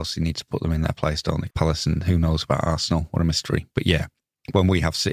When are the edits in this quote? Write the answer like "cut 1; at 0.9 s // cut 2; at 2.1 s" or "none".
cut 1; at 1.5 s